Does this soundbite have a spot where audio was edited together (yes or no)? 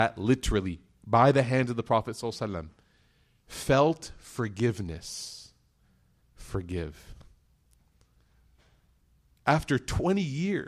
yes